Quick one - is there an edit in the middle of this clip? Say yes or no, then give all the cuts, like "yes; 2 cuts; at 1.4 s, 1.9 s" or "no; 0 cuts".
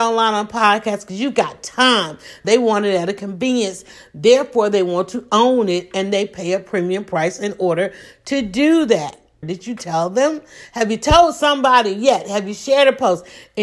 yes; 2 cuts; at 2.4 s, 9.4 s